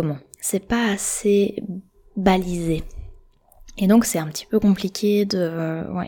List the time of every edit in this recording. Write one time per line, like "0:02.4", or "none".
none